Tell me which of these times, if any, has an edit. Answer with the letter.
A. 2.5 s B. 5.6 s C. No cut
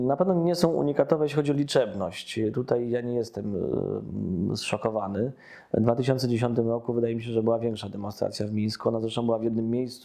C